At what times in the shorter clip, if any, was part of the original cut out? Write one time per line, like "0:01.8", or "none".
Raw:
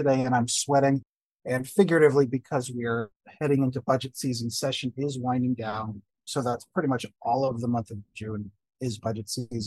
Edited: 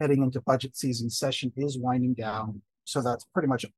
none